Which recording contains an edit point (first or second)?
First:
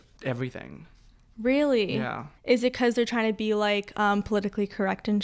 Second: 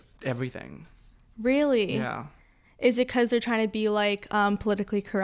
first